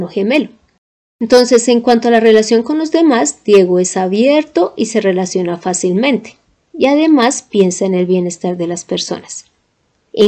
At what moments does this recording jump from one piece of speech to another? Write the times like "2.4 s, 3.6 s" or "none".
none